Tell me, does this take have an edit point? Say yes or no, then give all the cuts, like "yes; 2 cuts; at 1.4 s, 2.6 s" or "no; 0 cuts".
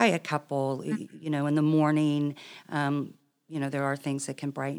no; 0 cuts